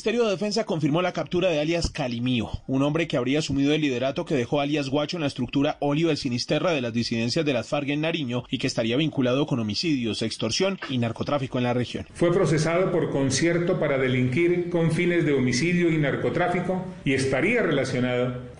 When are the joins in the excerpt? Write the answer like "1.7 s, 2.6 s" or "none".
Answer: 12.1 s